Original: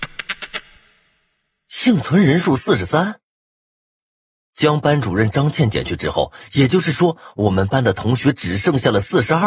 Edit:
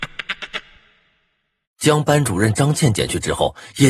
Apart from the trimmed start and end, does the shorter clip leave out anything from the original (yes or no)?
yes